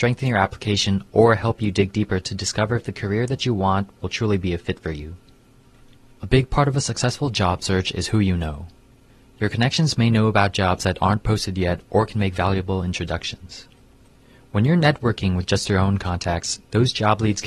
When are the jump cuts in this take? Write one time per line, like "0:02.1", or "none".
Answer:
0:06.2